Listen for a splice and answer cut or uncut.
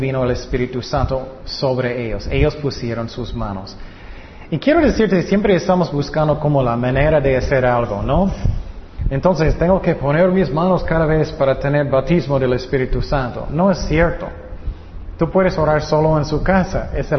uncut